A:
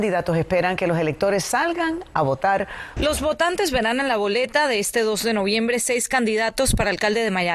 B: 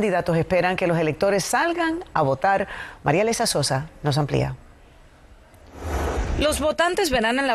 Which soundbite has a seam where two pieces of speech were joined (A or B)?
A